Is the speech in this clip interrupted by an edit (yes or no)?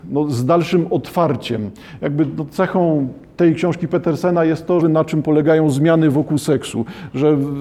yes